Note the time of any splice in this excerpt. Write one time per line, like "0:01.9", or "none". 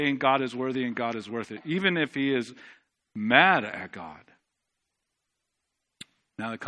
none